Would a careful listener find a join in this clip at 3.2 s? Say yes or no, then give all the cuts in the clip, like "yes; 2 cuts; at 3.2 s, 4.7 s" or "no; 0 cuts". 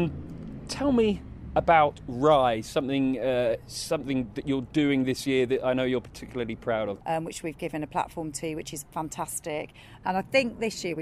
no; 2 cuts; at 7.0 s, 10.0 s